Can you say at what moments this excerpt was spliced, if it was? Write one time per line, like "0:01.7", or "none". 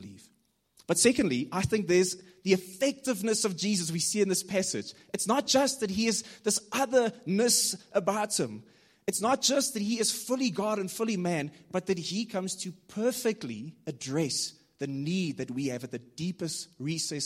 none